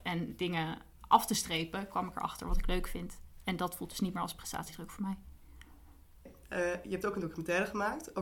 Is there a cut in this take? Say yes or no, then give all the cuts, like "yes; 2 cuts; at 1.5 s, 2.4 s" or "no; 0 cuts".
no; 0 cuts